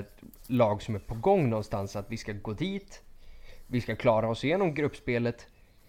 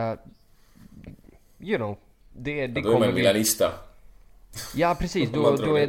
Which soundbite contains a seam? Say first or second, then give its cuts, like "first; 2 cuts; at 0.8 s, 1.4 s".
second; 1 cut; at 2.2 s